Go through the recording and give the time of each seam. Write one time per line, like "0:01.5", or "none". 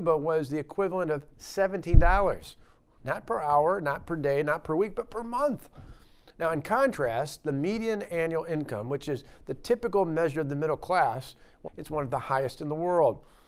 0:11.7